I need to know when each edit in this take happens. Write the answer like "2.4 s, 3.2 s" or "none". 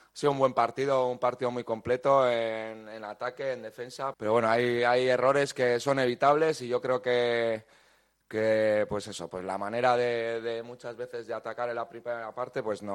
4.1 s